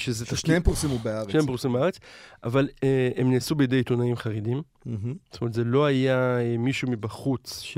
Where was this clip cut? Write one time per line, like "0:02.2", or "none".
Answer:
none